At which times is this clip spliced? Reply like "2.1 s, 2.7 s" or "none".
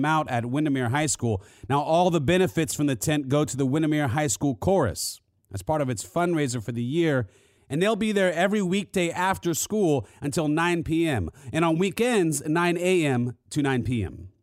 none